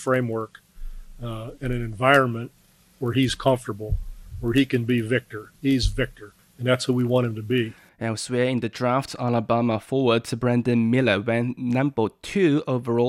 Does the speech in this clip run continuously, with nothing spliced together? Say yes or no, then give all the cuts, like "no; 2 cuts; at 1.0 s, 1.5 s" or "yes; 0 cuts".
no; 1 cut; at 5.5 s